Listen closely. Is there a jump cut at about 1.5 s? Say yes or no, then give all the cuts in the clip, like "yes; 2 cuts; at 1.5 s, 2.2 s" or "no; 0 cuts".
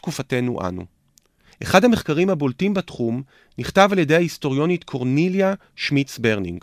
yes; 1 cut; at 1.5 s